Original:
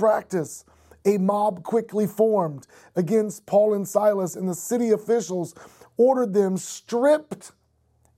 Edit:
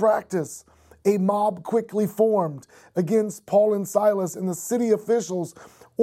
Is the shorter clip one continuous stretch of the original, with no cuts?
yes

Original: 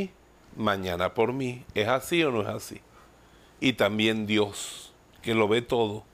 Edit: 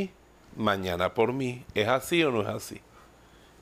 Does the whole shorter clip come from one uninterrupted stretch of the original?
yes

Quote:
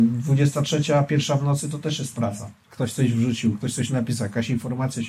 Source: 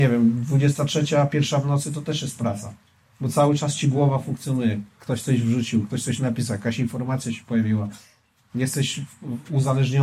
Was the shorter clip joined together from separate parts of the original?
yes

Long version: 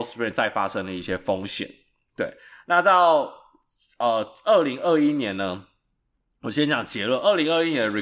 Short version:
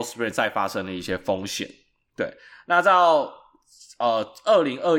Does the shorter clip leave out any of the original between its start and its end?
no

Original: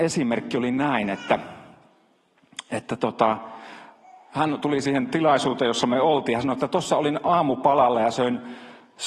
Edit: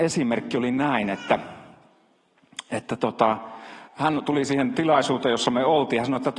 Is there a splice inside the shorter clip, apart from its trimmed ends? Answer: yes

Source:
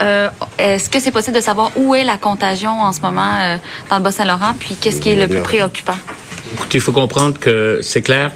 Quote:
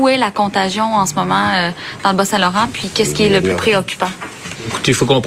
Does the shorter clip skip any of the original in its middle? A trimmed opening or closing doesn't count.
no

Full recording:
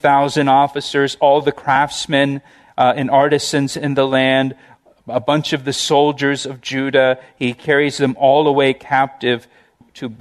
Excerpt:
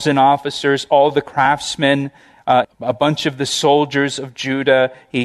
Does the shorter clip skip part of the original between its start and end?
yes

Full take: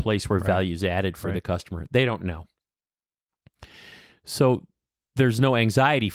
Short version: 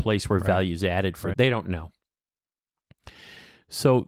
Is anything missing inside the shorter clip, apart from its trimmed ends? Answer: yes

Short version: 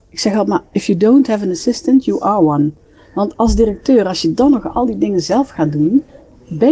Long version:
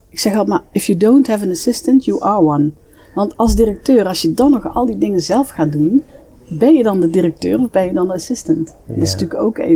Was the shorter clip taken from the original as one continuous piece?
yes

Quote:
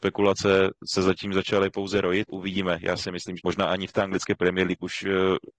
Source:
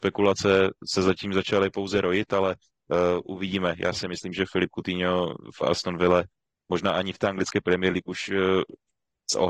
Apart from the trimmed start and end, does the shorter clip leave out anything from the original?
yes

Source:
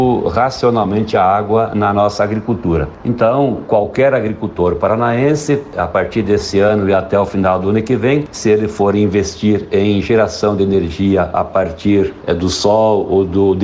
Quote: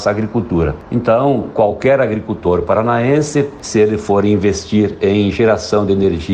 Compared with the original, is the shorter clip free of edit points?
no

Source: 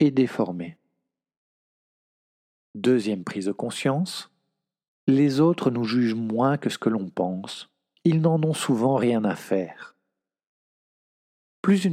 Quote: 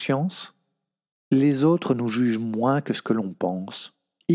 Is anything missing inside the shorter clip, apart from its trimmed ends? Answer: no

